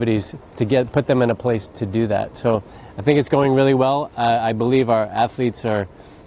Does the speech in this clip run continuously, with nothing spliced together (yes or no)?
yes